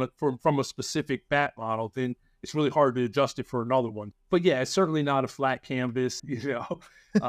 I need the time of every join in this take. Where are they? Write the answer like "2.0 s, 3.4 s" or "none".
4.1 s, 6.2 s